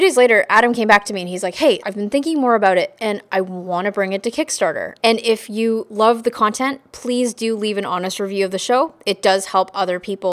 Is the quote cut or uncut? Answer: cut